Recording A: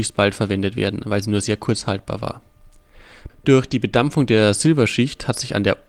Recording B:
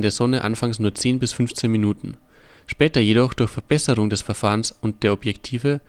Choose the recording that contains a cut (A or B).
A